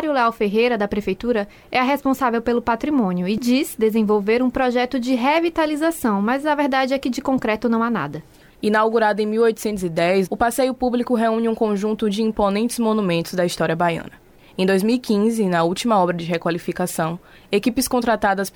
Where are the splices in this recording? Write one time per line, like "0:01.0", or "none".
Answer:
0:08.5
0:10.3